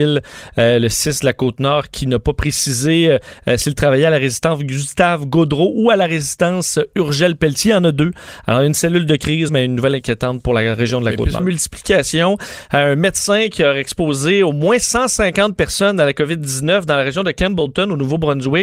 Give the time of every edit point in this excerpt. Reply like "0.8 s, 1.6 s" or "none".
9.5 s, 11.4 s